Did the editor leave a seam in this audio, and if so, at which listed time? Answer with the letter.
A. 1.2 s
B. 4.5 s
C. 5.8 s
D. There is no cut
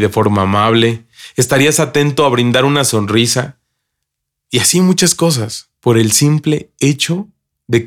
C